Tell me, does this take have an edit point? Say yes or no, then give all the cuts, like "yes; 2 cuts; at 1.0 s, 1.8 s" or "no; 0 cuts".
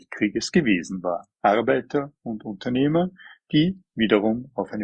yes; 1 cut; at 1.3 s